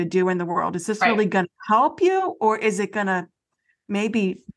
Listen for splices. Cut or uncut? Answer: uncut